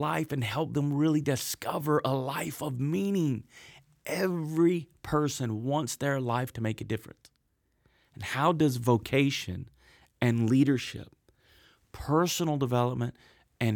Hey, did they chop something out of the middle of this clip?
no; 0 cuts

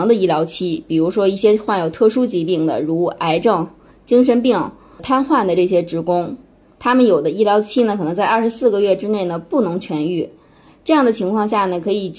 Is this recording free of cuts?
yes; 0 cuts

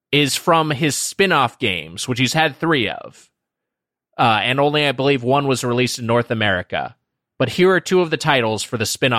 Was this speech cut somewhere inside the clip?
no; 0 cuts

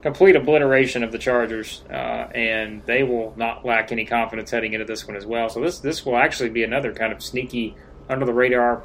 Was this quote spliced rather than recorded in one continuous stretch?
no; 0 cuts

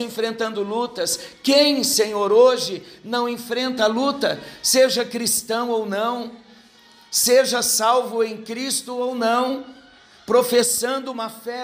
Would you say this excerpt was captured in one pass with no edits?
yes; 0 cuts

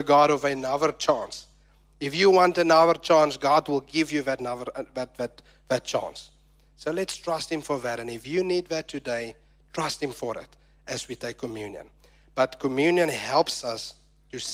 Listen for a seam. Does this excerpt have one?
no; 0 cuts

